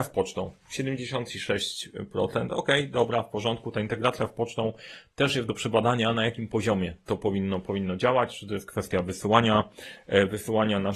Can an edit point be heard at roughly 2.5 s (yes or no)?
no